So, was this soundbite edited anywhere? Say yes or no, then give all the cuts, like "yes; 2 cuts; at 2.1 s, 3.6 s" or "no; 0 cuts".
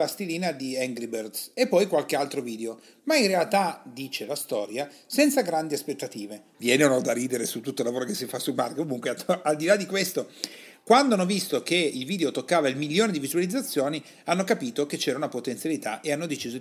yes; 1 cut; at 6.5 s